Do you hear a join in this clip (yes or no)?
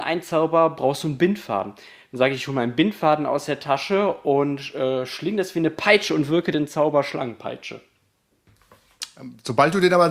no